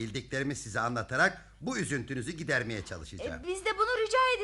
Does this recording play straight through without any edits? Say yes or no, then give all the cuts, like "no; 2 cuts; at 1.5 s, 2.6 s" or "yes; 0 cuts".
yes; 0 cuts